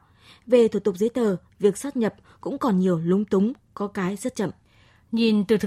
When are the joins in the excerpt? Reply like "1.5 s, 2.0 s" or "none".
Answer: none